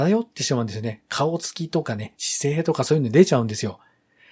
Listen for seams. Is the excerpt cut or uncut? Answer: uncut